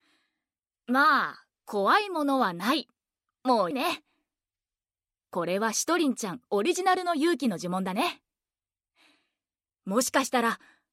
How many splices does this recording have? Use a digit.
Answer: 1